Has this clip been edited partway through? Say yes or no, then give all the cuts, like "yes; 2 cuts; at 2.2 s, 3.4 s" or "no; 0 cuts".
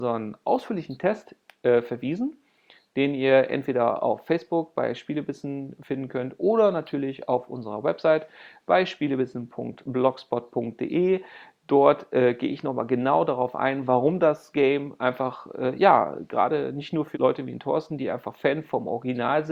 yes; 1 cut; at 17.1 s